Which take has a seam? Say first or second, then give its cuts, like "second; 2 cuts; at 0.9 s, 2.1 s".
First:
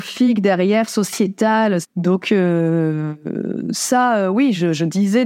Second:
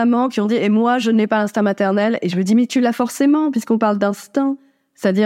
first; 1 cut; at 1.8 s